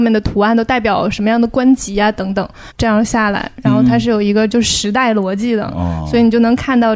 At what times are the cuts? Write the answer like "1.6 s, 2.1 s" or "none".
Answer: 2.7 s